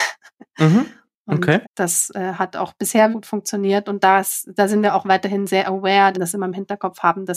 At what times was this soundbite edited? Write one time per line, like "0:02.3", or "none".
0:01.6
0:03.1
0:06.1